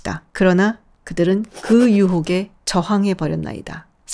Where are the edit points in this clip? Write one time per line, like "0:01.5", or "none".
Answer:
0:00.9